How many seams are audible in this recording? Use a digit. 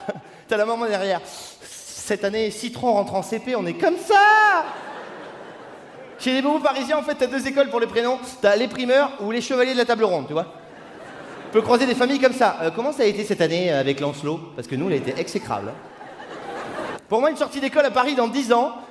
1